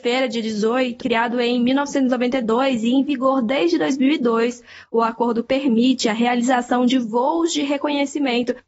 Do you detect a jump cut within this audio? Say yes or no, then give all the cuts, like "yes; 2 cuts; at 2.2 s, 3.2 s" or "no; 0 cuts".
yes; 1 cut; at 1.0 s